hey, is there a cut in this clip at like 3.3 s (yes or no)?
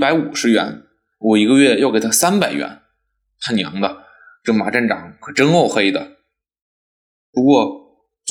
no